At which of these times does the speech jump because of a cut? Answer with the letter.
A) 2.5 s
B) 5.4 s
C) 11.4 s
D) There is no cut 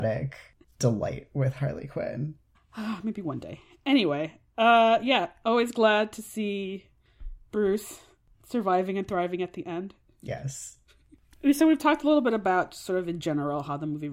A